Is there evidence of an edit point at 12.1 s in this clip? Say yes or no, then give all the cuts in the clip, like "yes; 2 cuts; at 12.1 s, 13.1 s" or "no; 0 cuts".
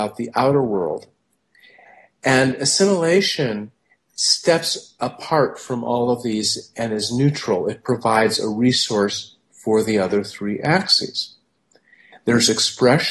yes; 1 cut; at 12.1 s